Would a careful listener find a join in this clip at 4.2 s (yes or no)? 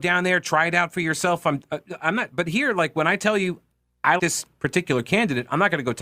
yes